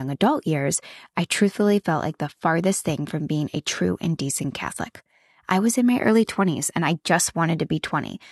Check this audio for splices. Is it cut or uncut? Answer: uncut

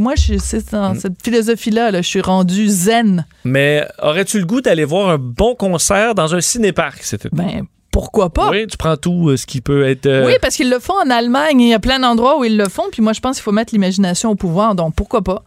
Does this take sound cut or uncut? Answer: uncut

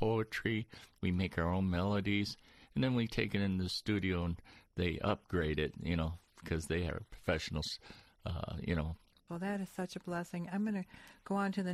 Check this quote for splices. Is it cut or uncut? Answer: cut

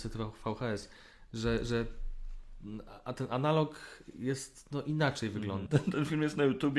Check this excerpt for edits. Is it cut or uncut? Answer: cut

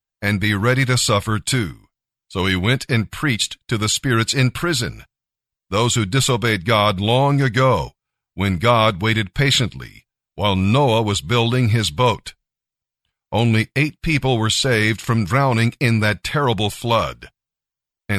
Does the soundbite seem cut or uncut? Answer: cut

